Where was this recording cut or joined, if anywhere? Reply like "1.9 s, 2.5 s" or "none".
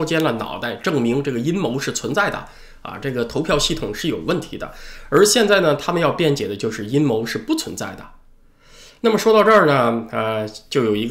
none